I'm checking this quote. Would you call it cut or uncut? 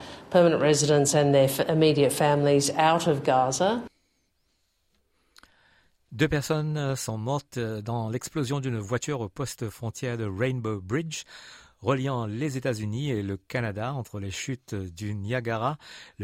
uncut